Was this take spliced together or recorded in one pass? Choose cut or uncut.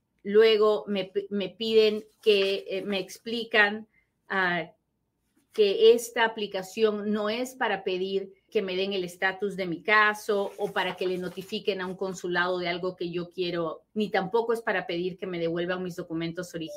cut